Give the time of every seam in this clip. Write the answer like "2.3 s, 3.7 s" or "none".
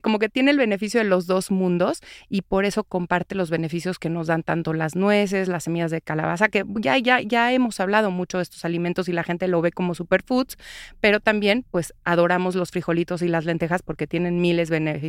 none